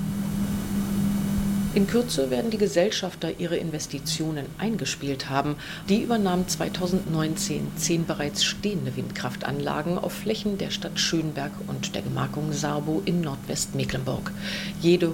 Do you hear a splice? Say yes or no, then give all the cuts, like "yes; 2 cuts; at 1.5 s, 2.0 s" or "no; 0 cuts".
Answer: yes; 1 cut; at 5.9 s